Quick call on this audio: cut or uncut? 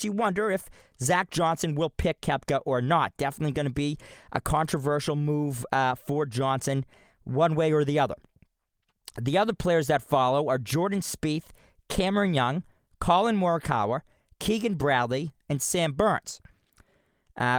uncut